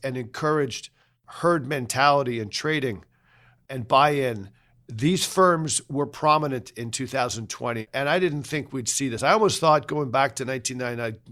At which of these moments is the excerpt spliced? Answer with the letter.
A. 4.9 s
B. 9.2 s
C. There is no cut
C